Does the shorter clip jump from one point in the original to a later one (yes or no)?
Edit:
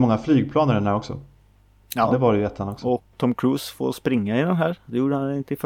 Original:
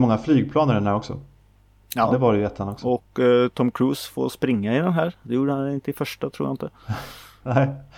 yes